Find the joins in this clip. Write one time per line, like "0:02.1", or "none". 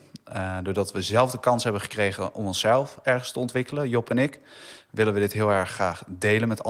none